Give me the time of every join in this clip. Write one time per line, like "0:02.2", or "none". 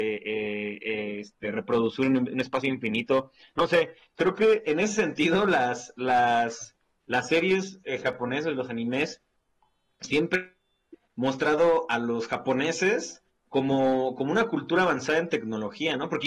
none